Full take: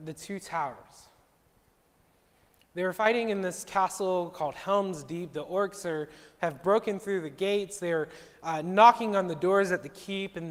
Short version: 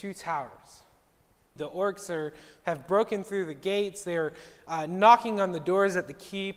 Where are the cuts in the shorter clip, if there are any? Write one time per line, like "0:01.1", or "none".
0:01.6